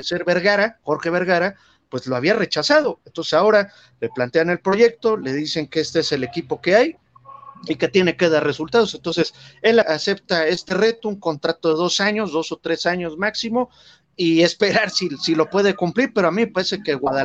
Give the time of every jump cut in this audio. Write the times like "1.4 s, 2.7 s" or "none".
9.8 s